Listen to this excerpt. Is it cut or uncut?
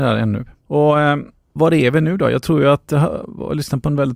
uncut